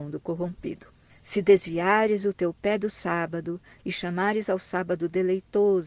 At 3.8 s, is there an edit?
yes; 2 cuts; at 1.1 s, 3.8 s

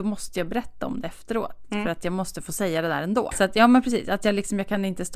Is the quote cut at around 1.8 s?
no; 1 cut; at 3.3 s

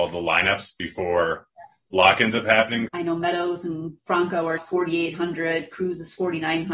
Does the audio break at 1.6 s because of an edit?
no; 2 cuts; at 2.9 s, 4.6 s

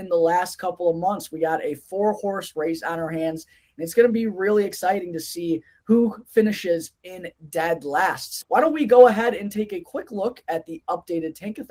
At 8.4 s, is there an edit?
yes; 1 cut; at 8.4 s

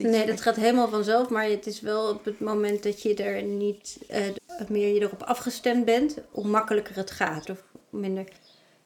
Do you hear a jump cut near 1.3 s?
no; 2 cuts; at 4.4 s, 7.4 s

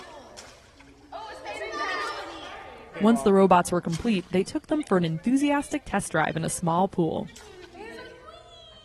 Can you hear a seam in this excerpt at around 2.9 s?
yes; 1 cut; at 2.9 s

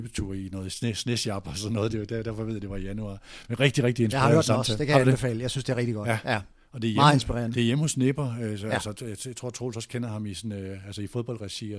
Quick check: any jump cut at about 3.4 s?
no; 0 cuts

